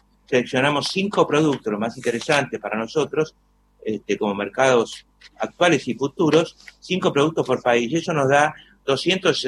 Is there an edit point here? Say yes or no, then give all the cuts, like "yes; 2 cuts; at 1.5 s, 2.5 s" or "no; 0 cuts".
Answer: no; 0 cuts